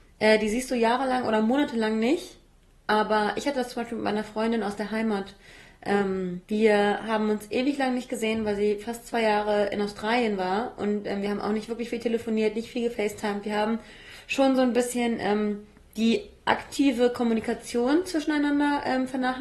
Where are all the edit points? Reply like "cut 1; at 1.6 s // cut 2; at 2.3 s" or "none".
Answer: cut 1; at 6.5 s